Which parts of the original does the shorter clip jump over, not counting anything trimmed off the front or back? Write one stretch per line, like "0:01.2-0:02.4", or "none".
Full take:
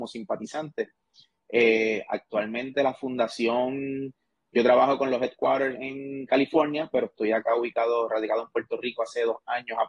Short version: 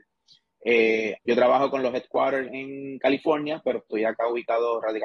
0:02.0-0:04.4